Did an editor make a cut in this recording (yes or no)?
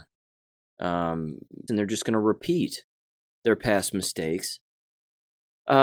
yes